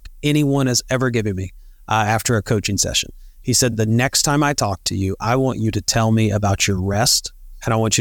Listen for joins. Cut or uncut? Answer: uncut